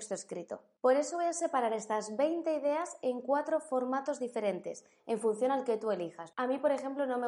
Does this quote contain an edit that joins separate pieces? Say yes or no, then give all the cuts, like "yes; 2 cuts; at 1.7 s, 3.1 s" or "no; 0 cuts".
yes; 1 cut; at 6.3 s